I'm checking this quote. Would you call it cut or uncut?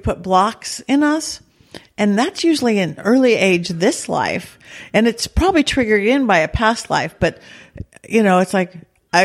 uncut